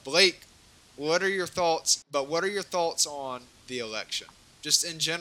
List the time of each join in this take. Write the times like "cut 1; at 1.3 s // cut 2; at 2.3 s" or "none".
cut 1; at 2.0 s